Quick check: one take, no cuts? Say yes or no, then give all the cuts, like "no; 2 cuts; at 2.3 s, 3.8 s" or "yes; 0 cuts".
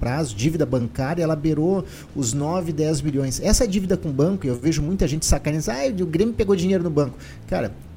yes; 0 cuts